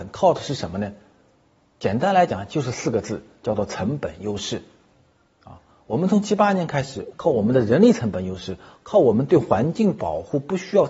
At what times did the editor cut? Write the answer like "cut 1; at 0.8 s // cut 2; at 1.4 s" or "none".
cut 1; at 7.1 s // cut 2; at 8.8 s